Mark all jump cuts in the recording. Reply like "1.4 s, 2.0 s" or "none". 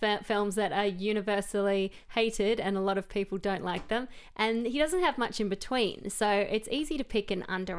none